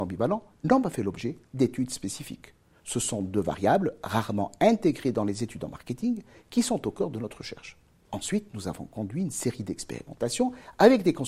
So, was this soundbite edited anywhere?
yes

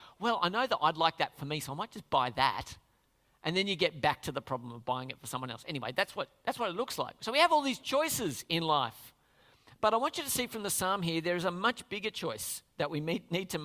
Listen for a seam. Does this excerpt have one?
no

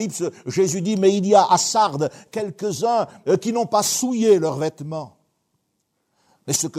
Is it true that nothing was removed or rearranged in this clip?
yes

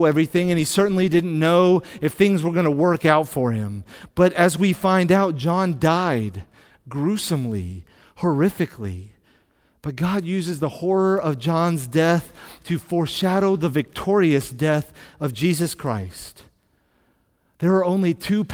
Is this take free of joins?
yes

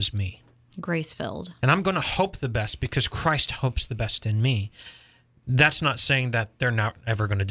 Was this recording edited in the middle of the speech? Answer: yes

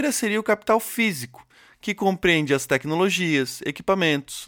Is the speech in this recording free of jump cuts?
yes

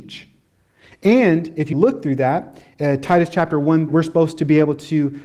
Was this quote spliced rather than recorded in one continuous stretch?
yes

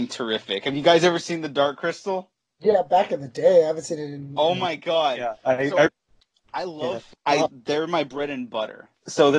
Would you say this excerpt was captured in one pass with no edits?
no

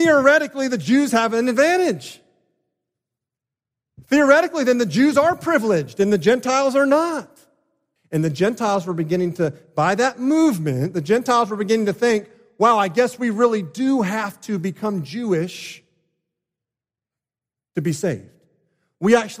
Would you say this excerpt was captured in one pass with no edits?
no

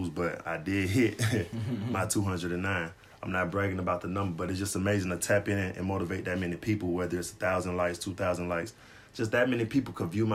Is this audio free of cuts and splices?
yes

